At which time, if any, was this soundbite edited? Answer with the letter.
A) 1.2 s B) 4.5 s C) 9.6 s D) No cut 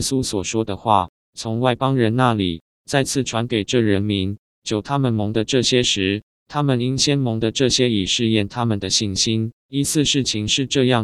C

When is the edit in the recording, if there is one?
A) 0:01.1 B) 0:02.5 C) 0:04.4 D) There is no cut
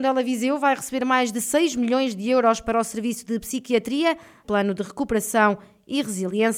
C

